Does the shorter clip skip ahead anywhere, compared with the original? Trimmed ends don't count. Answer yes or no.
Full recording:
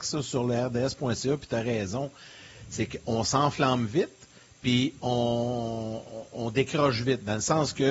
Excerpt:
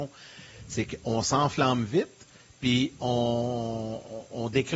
no